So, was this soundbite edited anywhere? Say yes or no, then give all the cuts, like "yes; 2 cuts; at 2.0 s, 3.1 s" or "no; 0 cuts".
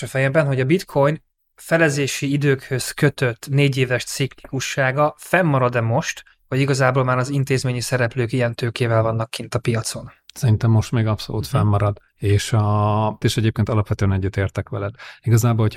yes; 2 cuts; at 12.1 s, 13.2 s